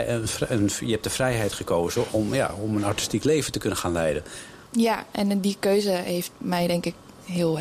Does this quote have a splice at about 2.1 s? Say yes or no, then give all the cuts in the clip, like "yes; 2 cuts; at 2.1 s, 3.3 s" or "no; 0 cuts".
yes; 2 cuts; at 2.1 s, 4.7 s